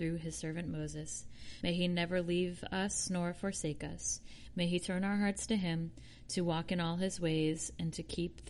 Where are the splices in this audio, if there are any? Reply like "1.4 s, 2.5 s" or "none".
1.6 s